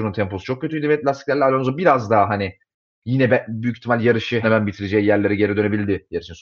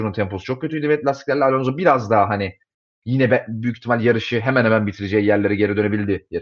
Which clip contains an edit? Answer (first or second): first